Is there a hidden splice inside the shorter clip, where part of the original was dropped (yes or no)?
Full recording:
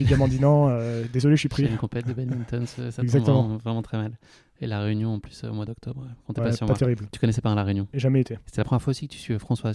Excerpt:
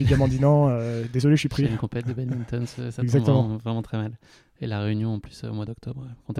no